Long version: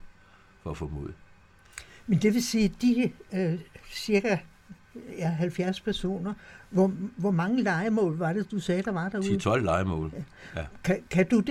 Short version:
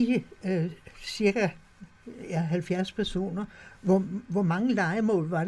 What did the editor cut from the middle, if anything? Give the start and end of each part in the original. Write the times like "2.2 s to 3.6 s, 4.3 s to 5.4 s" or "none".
none